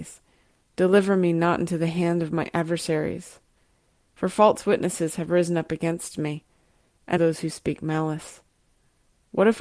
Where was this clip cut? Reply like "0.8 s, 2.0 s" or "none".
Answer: 7.2 s